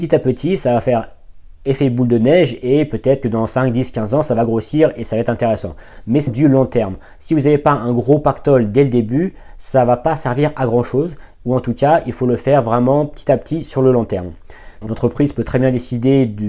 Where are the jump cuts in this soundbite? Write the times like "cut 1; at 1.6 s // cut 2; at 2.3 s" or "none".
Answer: cut 1; at 6.3 s // cut 2; at 14.8 s